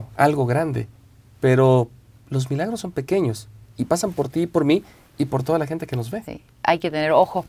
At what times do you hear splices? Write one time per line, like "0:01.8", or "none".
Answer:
0:06.2